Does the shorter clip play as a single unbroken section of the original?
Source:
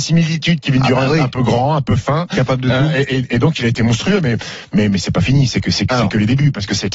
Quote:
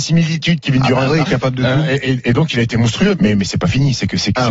no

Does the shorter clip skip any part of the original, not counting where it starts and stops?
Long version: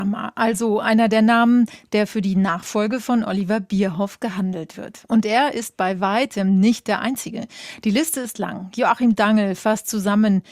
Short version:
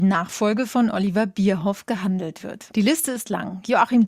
yes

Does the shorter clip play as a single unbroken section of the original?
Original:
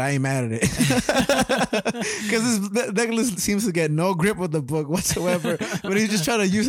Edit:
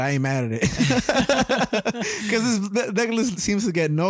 yes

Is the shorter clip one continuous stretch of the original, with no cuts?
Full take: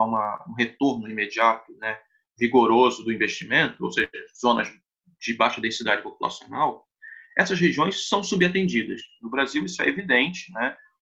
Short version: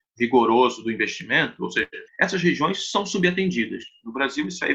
no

